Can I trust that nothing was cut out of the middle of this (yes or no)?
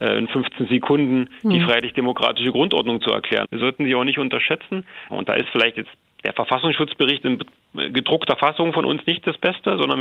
no